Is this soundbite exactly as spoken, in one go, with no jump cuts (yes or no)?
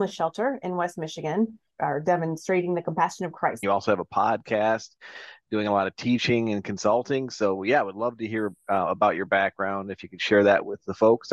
no